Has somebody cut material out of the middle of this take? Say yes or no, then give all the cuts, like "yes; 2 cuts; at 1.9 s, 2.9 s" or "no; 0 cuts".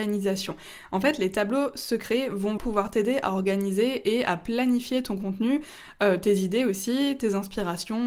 yes; 1 cut; at 2.6 s